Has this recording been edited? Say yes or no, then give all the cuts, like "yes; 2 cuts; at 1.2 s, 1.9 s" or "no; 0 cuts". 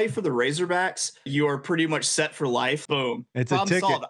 yes; 2 cuts; at 1.3 s, 2.9 s